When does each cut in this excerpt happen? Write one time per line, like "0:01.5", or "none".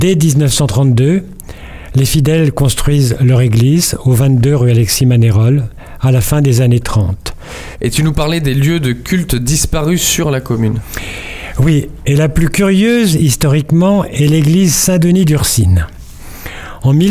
0:07.8